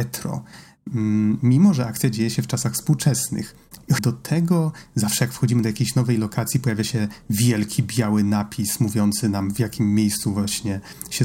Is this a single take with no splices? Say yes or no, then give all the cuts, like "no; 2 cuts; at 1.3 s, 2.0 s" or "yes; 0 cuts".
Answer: no; 1 cut; at 4.0 s